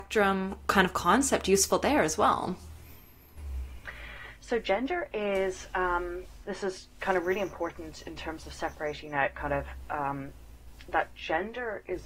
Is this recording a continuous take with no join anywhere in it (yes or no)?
no